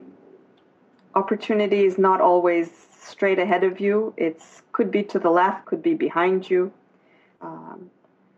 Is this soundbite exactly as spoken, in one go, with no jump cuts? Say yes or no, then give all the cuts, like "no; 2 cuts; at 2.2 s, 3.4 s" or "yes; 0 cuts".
no; 2 cuts; at 5.6 s, 7.4 s